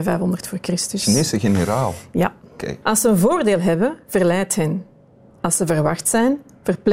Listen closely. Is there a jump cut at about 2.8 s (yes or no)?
yes